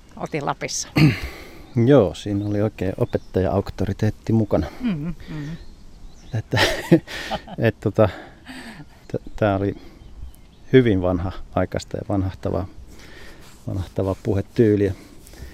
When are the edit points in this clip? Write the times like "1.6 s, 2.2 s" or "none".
6.3 s, 9.0 s

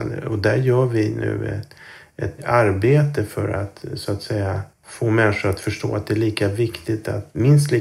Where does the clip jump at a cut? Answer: 2.4 s, 4.7 s

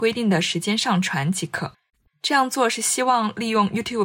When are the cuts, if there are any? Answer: none

